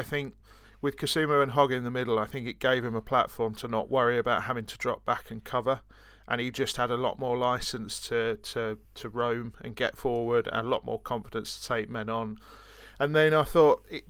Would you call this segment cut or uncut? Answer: uncut